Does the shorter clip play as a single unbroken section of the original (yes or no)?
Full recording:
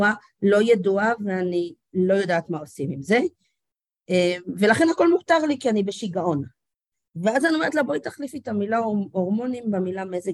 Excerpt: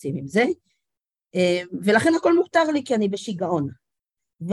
yes